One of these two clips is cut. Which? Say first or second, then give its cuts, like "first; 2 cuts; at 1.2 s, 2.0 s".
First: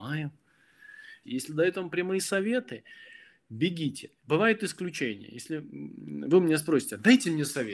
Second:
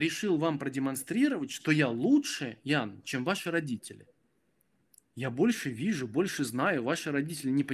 first; 1 cut; at 1.2 s